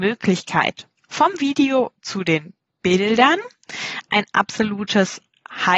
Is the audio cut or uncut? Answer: cut